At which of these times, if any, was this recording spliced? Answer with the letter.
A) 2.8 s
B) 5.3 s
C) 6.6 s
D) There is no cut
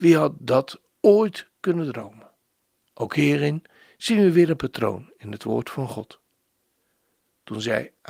A